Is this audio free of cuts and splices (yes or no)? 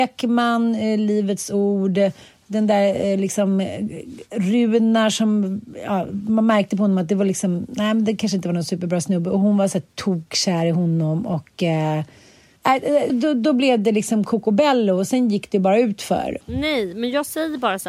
no